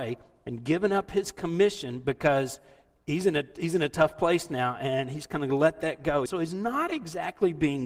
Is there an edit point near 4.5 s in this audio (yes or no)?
no